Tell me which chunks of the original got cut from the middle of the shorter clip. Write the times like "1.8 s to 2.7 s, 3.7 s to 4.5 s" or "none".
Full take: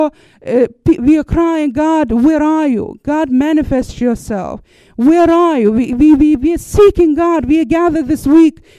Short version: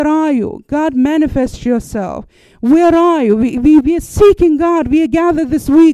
6.2 s to 6.4 s